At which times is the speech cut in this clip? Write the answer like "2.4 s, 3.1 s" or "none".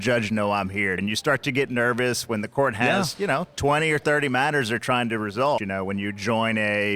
1.0 s, 5.6 s